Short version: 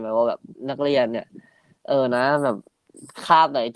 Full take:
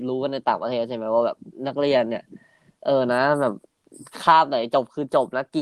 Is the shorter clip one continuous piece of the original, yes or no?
yes